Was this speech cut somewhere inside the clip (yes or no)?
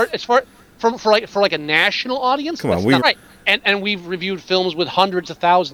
yes